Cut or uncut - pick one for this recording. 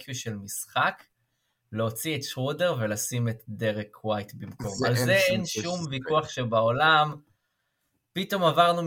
uncut